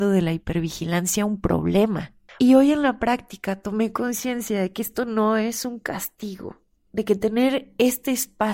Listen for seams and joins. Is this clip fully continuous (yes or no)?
no